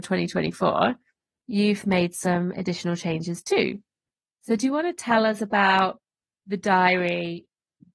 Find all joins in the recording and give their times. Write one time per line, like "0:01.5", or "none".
none